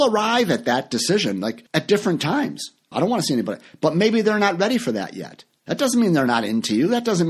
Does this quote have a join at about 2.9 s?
yes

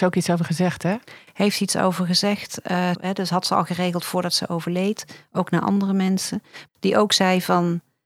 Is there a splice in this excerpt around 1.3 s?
no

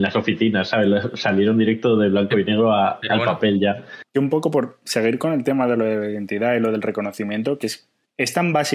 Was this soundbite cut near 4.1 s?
yes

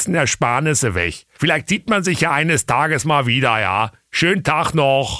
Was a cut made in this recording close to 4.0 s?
no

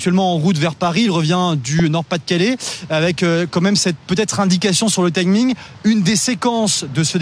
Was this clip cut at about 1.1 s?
no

